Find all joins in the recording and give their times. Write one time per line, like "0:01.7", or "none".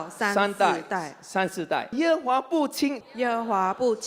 0:01.9
0:03.0